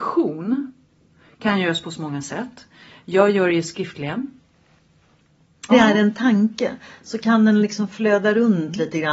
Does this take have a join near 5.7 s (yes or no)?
yes